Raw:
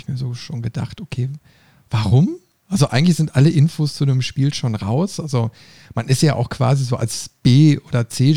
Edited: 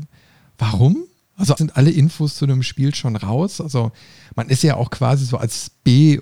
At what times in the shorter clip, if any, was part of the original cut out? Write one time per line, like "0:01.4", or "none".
0:01.6